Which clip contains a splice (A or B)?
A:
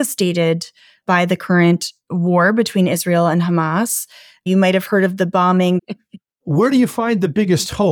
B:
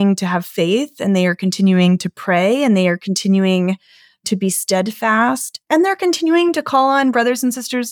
A